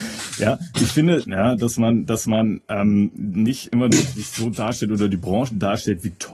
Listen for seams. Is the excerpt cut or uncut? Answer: cut